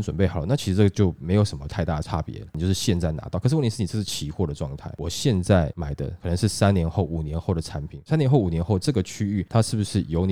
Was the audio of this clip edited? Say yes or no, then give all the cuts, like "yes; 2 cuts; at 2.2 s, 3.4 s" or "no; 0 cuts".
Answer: no; 0 cuts